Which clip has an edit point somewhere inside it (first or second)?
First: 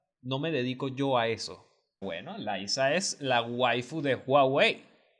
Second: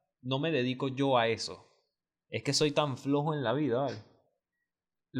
first